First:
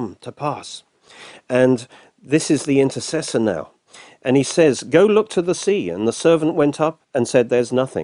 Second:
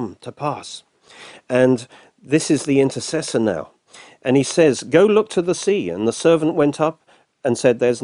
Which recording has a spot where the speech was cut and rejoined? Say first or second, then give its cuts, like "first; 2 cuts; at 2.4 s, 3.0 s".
first; 1 cut; at 7.0 s